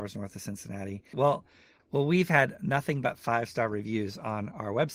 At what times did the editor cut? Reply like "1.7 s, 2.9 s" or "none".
1.1 s